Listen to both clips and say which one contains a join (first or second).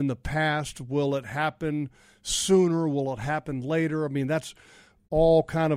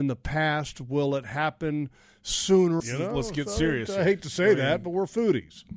second